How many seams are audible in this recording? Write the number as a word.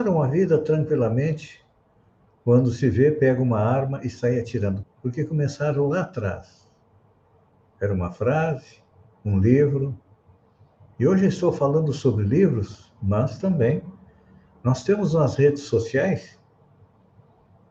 two